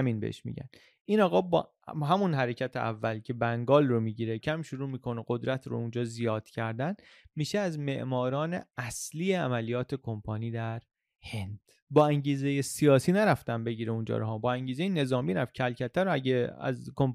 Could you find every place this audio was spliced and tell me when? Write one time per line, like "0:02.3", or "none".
0:04.4